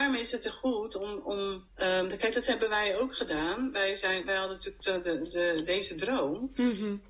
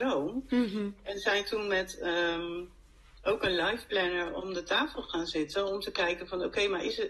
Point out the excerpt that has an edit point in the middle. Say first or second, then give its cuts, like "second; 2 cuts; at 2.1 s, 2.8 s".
first; 1 cut; at 1.7 s